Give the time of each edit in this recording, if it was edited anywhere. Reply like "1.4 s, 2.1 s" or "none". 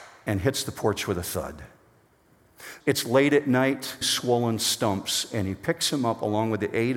2.8 s, 4.0 s